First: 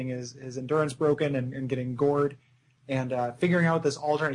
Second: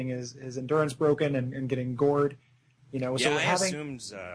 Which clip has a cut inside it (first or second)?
second